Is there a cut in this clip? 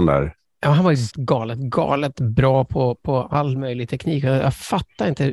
yes; 1 cut; at 1.1 s

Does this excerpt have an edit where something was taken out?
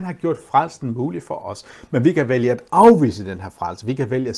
no; 0 cuts

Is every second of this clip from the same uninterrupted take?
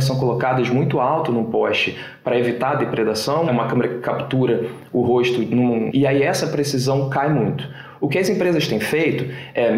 no; 2 cuts; at 3.5 s, 5.9 s

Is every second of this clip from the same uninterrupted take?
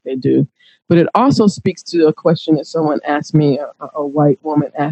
yes; 0 cuts

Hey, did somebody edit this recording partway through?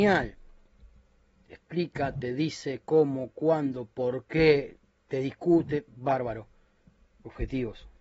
no; 0 cuts

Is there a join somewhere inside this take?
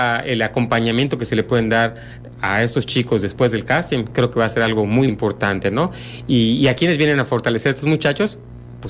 yes; 1 cut; at 5.1 s

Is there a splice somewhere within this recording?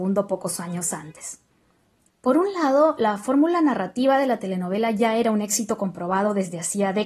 yes; 1 cut; at 2.1 s

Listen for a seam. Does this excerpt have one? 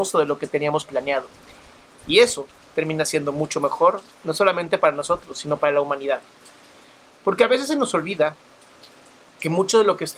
no; 0 cuts

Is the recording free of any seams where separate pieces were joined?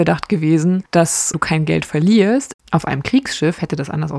no; 1 cut; at 2.5 s

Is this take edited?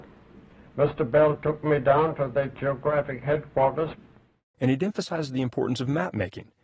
yes; 1 cut; at 4.5 s

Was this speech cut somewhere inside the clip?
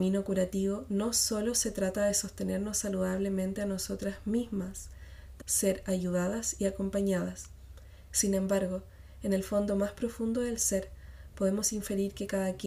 yes; 2 cuts; at 5.4 s, 8.1 s

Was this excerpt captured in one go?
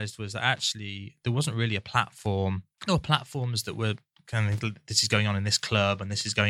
yes; 0 cuts

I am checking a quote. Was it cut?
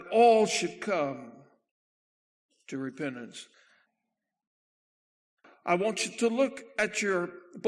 no; 0 cuts

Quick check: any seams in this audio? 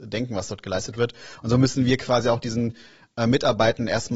no; 0 cuts

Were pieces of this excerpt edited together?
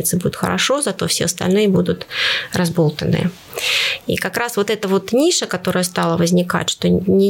no; 0 cuts

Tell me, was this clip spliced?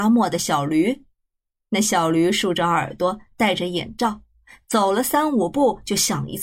no; 0 cuts

